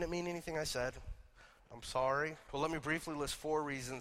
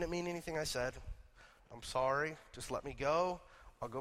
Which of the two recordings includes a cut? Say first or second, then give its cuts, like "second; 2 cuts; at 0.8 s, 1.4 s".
first; 1 cut; at 2.5 s